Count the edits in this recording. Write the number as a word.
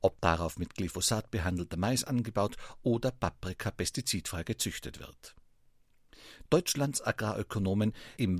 one